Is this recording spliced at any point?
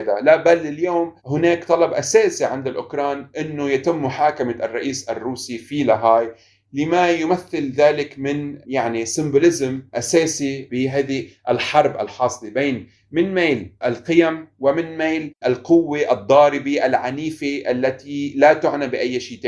yes; 1 cut; at 1.2 s

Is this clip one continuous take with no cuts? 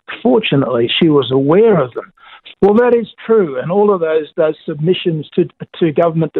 no; 1 cut; at 2.5 s

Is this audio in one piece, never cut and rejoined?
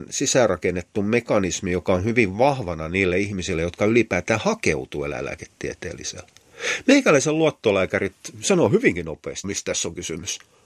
no; 1 cut; at 9.4 s

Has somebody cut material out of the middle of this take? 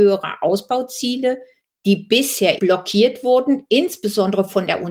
yes; 1 cut; at 2.6 s

